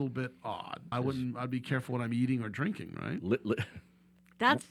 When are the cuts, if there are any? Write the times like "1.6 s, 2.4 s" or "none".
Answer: 0.9 s